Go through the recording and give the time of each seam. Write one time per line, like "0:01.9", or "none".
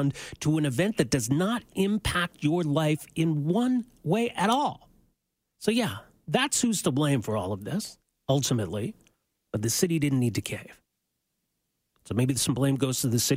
0:05.4
0:09.5